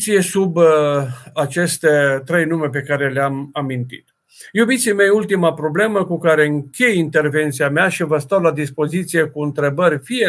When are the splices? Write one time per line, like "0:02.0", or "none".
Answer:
none